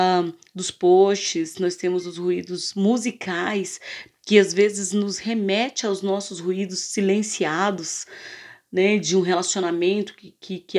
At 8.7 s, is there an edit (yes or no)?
no